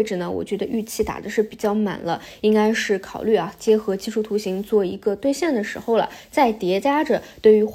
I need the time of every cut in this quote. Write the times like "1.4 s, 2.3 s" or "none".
none